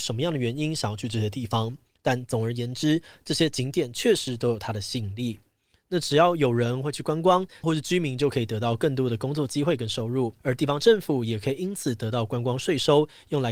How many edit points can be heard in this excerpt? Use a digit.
2